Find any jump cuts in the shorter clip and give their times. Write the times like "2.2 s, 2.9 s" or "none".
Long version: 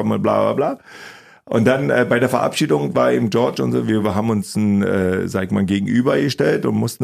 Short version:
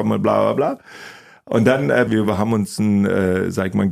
2.1 s

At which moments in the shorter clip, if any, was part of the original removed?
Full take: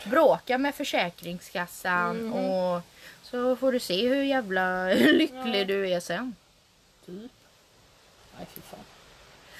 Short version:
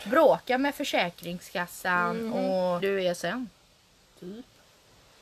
2.8 s

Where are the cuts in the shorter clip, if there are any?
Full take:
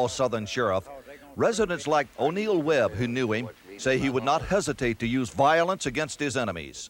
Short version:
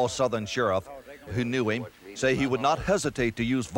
1.3 s

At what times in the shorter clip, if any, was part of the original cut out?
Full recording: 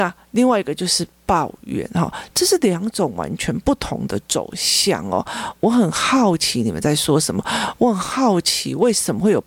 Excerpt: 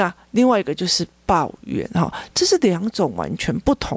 none

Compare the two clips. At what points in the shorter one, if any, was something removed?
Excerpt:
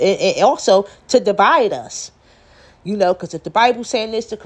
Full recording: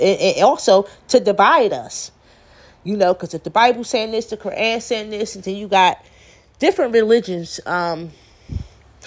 none

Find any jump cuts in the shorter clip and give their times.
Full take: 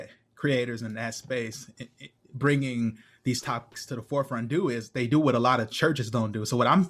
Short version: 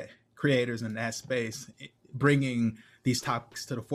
1.7 s

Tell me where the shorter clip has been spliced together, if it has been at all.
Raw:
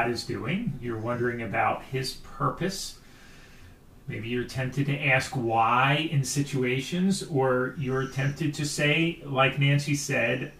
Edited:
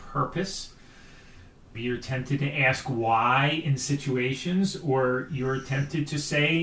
1.7 s

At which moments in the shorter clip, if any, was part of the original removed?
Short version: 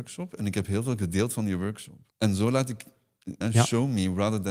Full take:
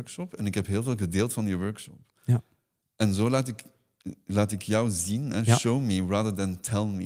2.1 s, 3.4 s

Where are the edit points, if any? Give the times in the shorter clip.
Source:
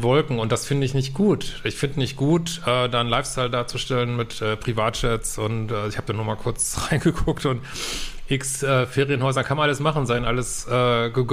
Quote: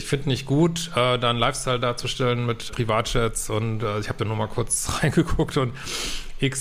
2.7 s

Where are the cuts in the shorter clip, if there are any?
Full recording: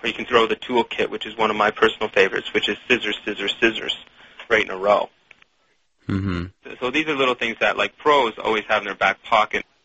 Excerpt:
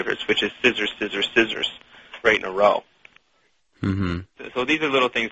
none

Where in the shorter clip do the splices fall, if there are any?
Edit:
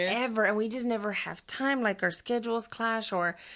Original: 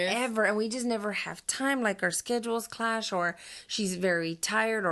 none

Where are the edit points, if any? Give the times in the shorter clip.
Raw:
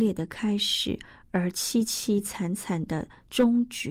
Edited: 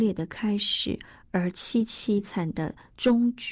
2.2 s

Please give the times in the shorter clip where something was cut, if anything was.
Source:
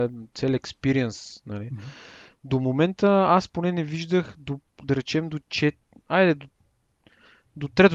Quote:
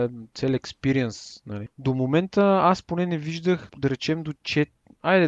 1.7 s, 3.7 s

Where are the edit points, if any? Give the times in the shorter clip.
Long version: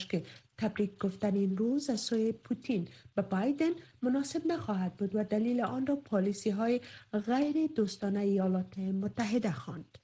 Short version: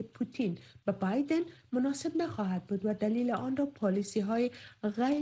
none

